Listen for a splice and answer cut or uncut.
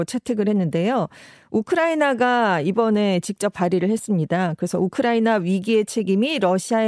uncut